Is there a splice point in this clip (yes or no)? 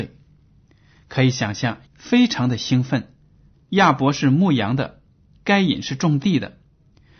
yes